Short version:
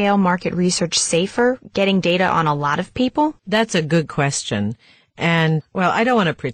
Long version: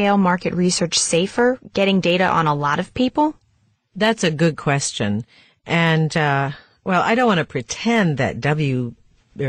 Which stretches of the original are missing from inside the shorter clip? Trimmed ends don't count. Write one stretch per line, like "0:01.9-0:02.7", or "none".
0:03.4-0:03.9
0:06.1-0:06.7